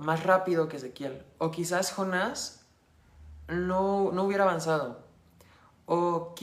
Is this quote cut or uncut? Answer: uncut